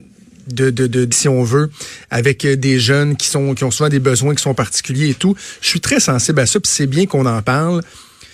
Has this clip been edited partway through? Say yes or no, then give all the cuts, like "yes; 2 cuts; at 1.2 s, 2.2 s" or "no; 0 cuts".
yes; 1 cut; at 1.1 s